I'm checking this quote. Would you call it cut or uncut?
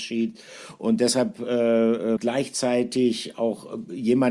cut